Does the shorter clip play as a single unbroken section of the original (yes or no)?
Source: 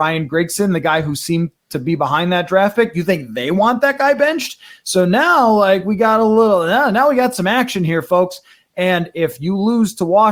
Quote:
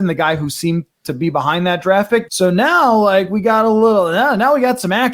no